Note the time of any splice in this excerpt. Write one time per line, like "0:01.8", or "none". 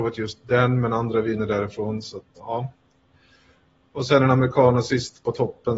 0:02.3